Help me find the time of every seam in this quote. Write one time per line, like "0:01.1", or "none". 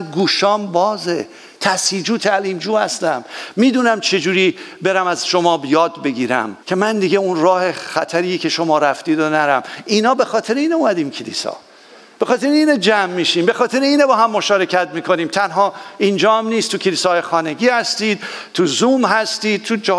0:06.6